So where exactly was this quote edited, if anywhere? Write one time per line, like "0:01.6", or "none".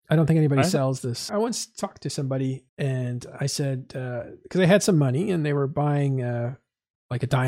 0:01.3
0:02.7